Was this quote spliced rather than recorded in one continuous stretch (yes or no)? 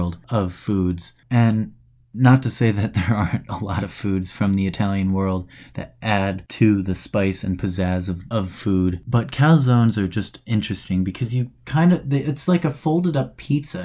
yes